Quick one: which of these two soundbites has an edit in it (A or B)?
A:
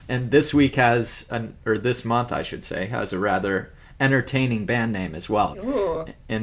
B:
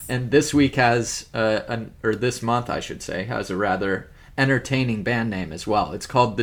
A